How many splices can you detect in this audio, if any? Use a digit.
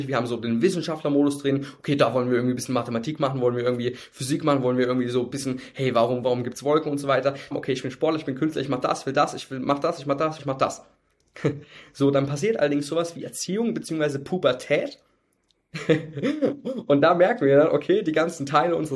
3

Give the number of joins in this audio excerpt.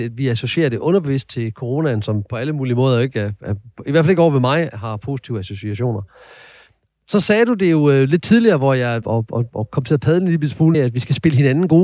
2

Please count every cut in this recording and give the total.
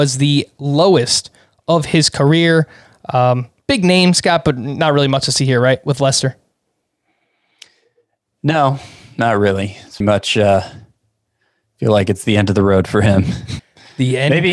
2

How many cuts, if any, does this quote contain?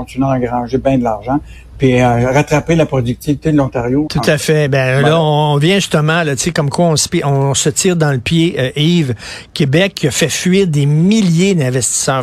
1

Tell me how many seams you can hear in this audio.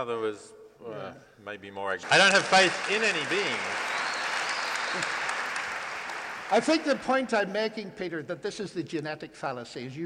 1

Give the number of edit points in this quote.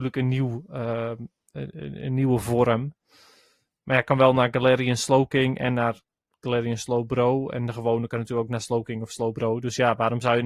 0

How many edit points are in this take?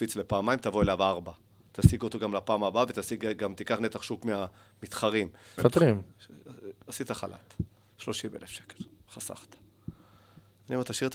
1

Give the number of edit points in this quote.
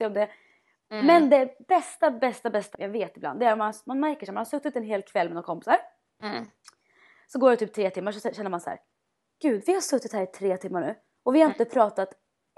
1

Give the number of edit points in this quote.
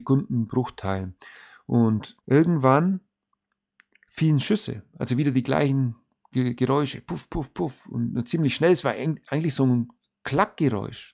1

